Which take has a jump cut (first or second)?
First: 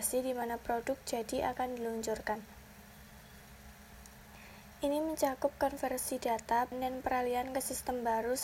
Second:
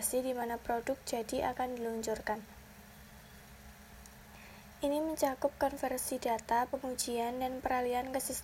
first